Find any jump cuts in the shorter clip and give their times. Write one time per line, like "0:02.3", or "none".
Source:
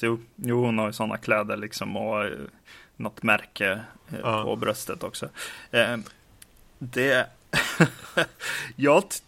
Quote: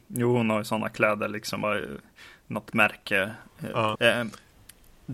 0:01.6
0:04.0